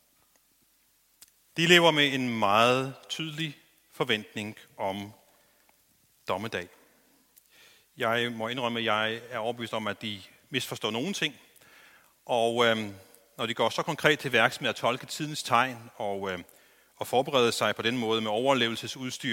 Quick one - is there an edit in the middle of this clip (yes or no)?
no